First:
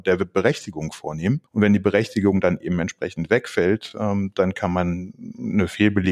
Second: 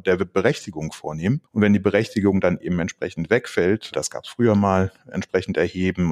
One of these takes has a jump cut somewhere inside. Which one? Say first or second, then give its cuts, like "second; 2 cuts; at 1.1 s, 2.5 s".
second; 1 cut; at 3.9 s